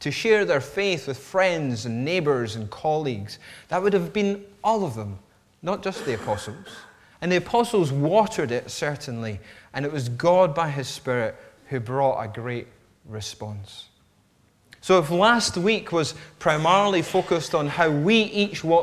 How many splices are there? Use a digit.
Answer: 1